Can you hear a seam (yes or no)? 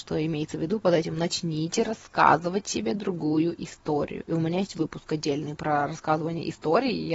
no